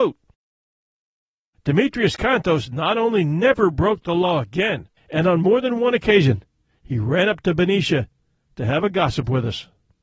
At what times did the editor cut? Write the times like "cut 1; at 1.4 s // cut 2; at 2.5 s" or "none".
cut 1; at 5.0 s